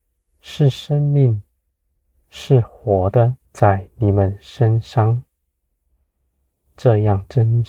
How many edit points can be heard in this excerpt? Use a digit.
1